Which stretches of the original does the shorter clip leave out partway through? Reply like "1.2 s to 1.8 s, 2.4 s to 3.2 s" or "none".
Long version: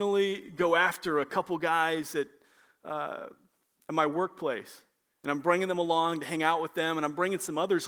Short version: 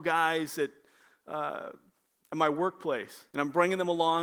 4.9 s to 5.2 s